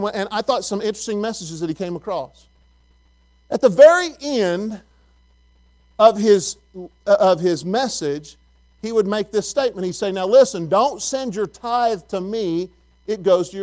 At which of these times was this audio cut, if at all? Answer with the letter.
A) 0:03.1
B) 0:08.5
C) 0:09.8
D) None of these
D